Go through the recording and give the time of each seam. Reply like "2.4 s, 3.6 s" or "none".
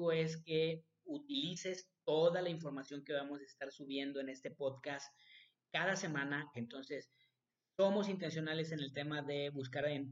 6.5 s